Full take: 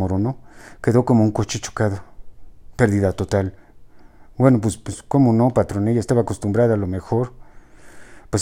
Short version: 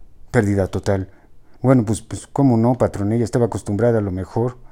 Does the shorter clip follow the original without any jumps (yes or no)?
no